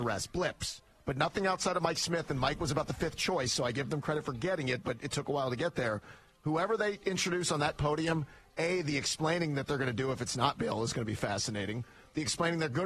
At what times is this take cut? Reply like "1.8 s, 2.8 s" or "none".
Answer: none